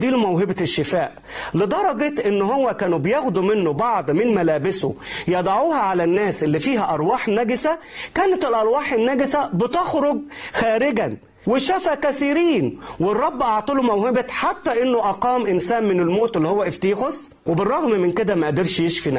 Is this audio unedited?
yes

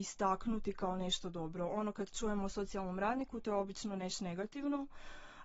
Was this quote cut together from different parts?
no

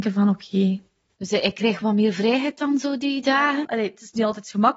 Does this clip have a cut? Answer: yes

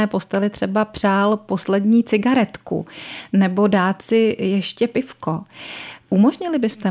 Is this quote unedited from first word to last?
yes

